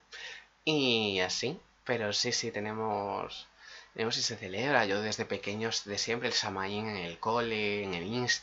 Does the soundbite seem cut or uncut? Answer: uncut